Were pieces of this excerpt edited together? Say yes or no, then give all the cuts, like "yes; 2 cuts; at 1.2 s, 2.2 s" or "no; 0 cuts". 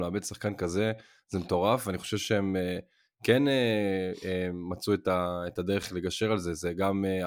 no; 0 cuts